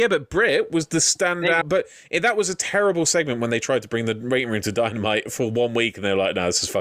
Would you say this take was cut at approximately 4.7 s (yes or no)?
no